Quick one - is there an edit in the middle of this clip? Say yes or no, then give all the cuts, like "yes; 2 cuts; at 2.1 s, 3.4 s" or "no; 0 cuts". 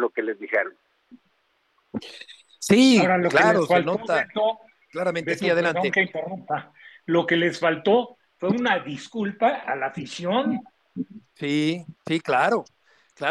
yes; 1 cut; at 12.0 s